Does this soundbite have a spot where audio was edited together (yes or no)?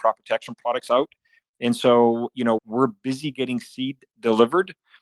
yes